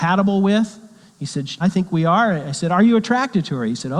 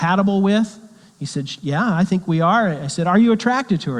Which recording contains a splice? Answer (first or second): first